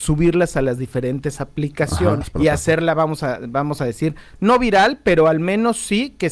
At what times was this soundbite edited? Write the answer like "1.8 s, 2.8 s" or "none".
2.2 s